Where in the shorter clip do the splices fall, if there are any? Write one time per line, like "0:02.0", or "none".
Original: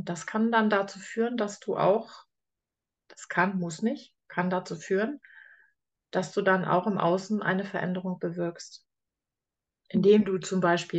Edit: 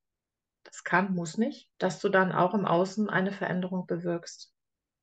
0:01.7